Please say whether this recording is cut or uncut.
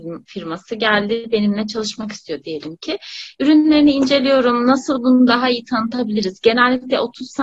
uncut